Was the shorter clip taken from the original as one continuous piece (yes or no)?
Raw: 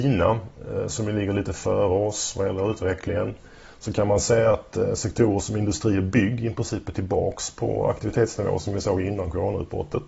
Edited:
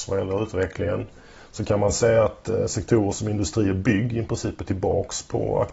yes